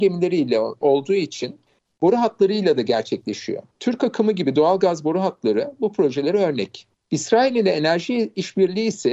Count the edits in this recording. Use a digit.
1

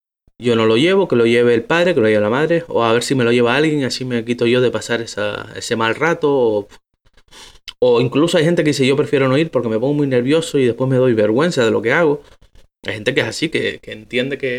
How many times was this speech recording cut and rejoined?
0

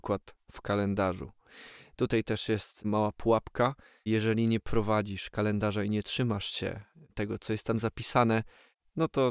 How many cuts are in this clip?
0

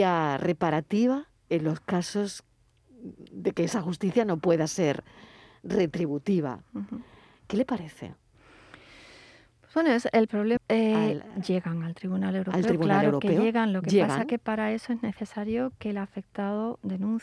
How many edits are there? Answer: 1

